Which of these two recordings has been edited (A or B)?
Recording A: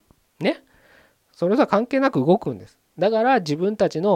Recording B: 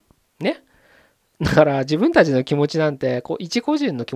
A